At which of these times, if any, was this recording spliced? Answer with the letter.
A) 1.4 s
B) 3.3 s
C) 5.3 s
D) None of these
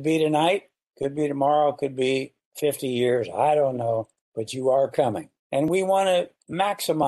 D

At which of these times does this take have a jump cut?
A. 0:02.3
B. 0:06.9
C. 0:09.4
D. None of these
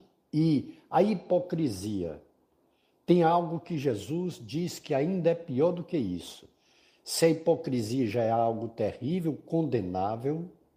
D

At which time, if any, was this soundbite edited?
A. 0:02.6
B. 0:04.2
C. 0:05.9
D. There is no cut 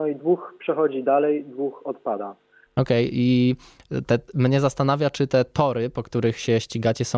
A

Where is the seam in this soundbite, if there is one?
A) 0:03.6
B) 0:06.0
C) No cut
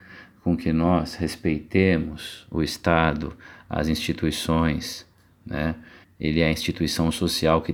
B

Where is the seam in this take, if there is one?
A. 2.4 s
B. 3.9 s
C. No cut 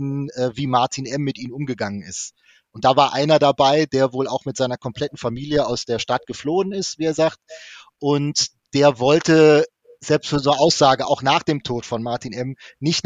C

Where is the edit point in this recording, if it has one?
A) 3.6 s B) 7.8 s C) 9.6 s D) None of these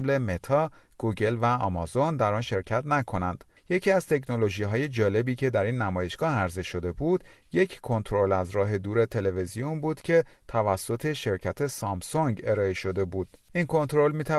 A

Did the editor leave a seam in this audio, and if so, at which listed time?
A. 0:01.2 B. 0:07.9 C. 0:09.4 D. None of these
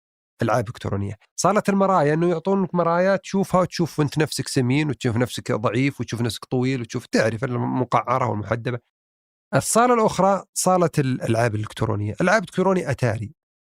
A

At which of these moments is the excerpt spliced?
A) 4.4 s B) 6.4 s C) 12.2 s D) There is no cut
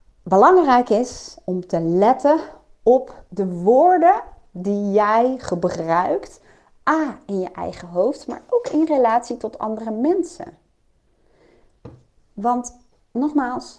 D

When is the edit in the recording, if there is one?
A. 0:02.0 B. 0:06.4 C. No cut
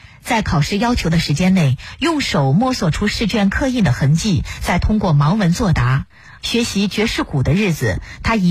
B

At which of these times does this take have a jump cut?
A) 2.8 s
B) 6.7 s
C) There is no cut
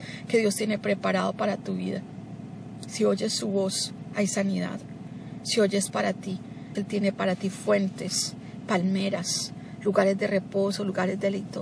B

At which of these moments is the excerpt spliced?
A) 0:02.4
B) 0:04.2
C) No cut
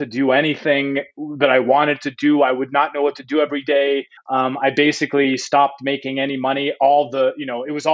B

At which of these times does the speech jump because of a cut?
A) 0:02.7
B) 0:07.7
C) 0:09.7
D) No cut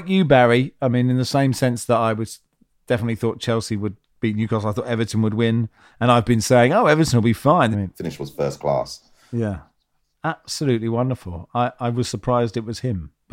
B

